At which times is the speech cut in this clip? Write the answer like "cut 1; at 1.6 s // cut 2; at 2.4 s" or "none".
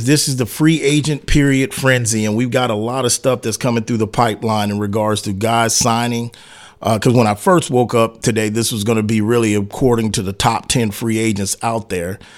none